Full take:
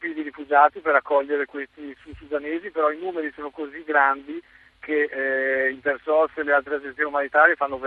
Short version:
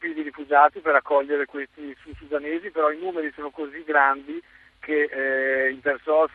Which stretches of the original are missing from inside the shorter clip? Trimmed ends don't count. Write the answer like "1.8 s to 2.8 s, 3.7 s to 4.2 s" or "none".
none